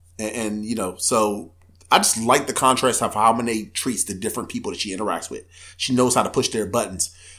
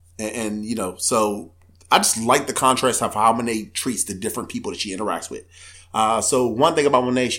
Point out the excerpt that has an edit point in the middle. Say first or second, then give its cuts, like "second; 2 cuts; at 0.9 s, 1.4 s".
second; 1 cut; at 5.7 s